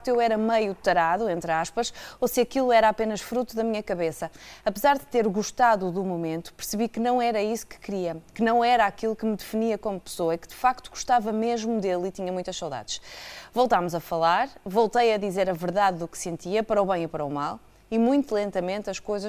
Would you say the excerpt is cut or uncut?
uncut